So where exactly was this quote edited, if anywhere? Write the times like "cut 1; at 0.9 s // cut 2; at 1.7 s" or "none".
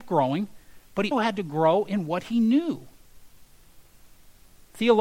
cut 1; at 1.1 s